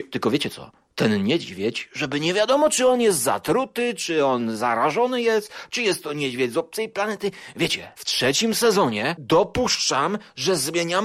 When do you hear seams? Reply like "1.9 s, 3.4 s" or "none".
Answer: none